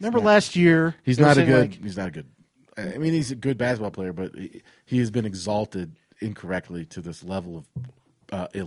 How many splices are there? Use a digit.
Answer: 0